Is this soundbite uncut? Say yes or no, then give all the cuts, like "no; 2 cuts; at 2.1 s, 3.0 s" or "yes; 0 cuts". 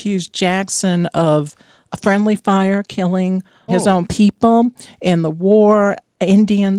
no; 1 cut; at 3.7 s